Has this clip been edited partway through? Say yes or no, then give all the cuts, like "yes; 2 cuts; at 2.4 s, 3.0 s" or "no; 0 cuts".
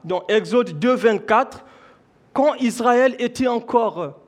no; 0 cuts